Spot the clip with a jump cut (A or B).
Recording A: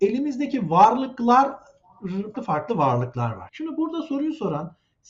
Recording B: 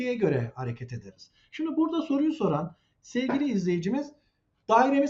A